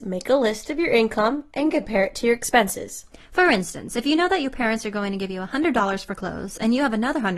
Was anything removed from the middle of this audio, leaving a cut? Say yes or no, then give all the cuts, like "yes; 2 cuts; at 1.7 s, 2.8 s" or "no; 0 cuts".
no; 0 cuts